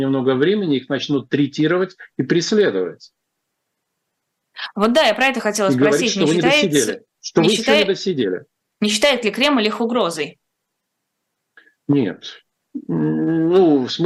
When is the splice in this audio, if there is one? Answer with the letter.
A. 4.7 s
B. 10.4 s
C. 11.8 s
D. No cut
D